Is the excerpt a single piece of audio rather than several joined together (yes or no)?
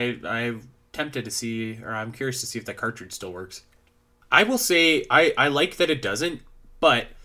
no